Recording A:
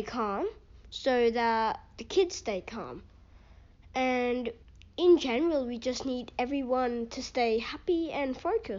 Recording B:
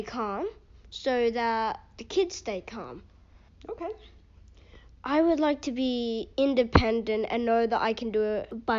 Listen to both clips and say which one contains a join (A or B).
B